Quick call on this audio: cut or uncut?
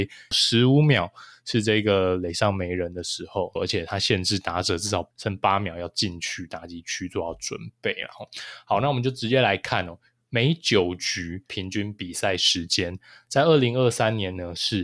cut